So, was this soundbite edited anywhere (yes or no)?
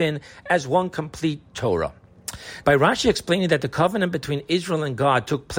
yes